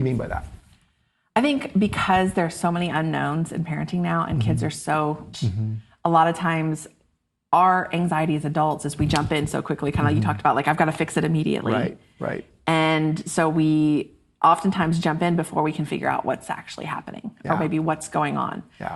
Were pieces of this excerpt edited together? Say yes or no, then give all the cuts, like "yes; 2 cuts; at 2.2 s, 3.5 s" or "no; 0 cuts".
yes; 1 cut; at 5.3 s